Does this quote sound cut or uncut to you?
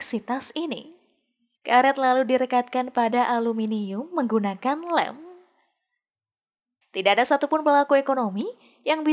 cut